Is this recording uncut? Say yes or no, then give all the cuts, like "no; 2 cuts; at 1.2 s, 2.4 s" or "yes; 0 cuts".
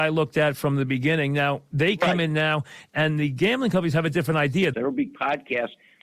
no; 1 cut; at 4.7 s